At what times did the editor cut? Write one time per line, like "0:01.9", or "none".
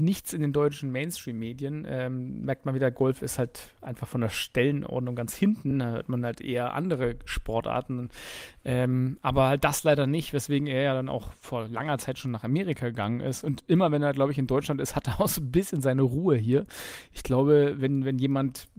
none